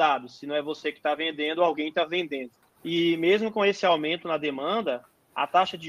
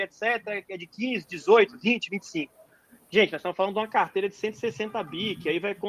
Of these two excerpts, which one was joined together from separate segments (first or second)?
first